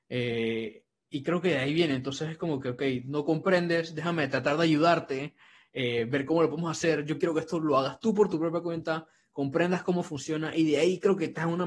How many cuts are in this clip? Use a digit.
0